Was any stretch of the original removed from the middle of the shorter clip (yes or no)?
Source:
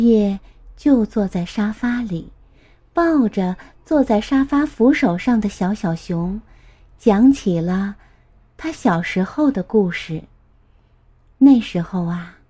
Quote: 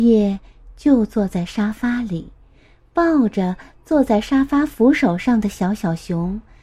no